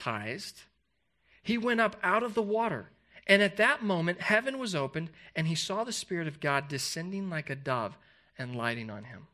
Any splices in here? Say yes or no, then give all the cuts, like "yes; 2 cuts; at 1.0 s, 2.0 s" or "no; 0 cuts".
no; 0 cuts